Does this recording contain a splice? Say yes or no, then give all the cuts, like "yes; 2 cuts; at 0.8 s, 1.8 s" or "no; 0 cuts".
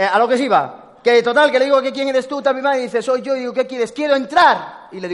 no; 0 cuts